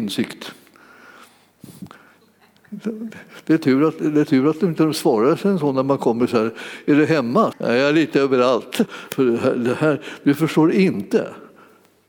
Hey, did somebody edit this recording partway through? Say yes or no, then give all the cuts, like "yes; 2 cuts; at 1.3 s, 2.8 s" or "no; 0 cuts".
yes; 2 cuts; at 7.5 s, 8.9 s